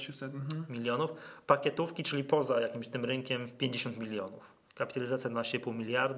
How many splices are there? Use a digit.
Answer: 1